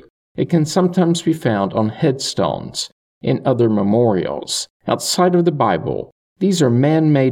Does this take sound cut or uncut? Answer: cut